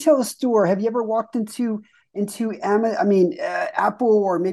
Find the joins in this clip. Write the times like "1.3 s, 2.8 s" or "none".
none